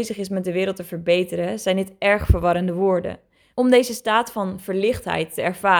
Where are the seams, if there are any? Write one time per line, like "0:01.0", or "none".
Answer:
0:03.5